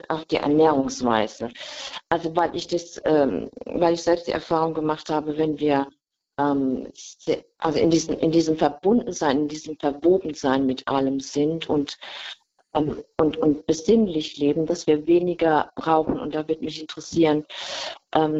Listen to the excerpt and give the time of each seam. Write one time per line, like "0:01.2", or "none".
none